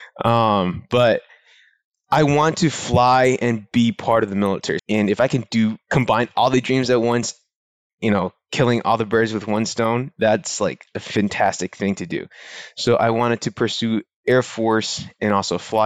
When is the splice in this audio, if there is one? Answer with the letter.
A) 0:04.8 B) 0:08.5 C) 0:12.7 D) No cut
A